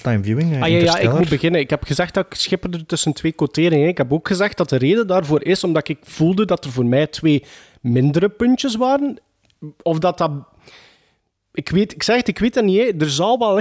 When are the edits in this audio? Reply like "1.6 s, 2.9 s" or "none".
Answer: none

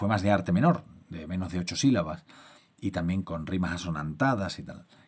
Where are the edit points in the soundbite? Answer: 3.2 s

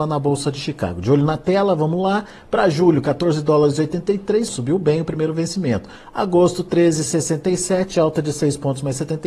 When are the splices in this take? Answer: 4.5 s

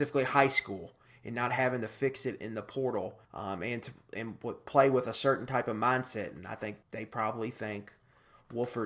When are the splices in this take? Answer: 3.2 s, 6.8 s

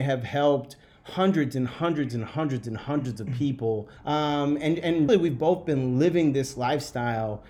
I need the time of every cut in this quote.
4.0 s, 5.1 s

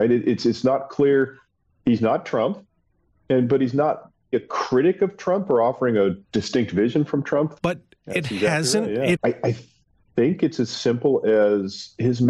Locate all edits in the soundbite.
4.3 s, 7.6 s, 9.1 s

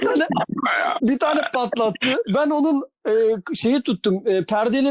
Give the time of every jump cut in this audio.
1.0 s

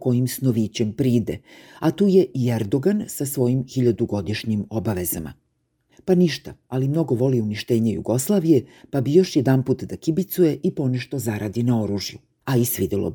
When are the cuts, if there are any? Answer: 5.9 s

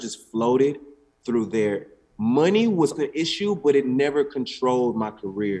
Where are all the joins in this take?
3.0 s

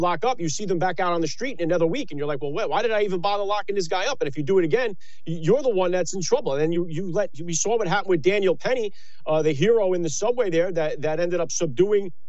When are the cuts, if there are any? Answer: none

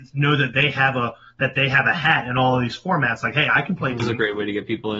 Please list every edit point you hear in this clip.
4.0 s

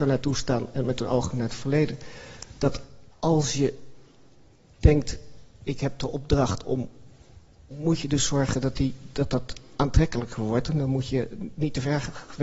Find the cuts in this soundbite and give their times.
5.5 s, 7.7 s

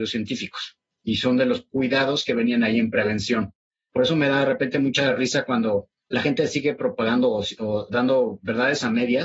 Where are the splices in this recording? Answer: 3.9 s

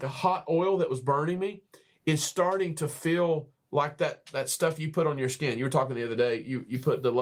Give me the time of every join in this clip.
none

